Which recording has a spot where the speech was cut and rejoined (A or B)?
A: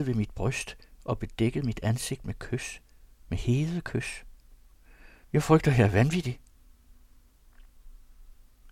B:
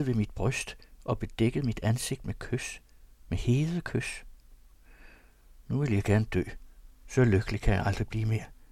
A